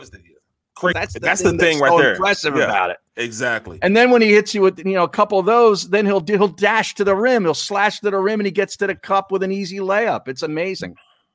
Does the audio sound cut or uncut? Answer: cut